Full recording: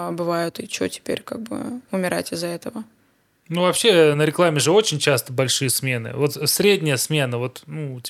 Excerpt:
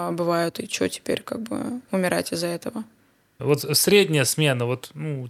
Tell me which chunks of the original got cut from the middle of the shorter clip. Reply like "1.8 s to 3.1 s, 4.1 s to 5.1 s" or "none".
3.4 s to 6.1 s